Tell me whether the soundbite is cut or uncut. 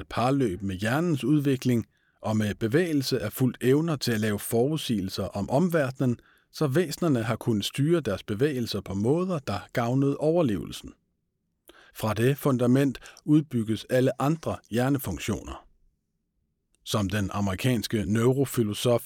uncut